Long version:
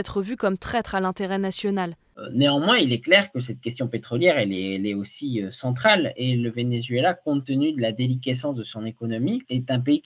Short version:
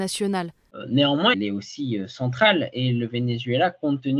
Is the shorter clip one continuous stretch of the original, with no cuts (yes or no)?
no